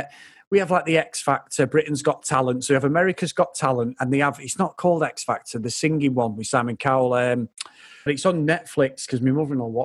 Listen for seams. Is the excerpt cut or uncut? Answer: cut